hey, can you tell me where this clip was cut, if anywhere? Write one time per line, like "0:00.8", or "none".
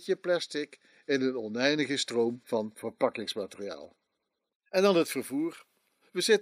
none